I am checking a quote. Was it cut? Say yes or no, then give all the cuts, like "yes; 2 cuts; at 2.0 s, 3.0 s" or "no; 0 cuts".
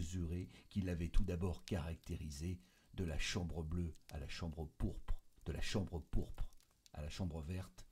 yes; 1 cut; at 5.4 s